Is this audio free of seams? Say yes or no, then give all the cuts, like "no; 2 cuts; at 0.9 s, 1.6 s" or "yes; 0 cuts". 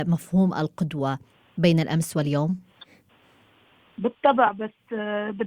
yes; 0 cuts